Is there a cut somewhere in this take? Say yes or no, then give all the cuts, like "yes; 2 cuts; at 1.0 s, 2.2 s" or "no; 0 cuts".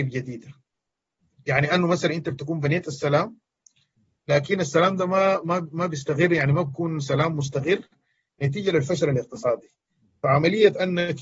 no; 0 cuts